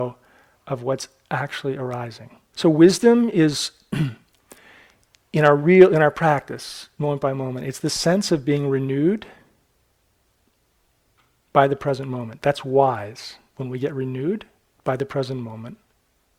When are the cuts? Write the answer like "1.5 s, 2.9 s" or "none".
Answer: 2.5 s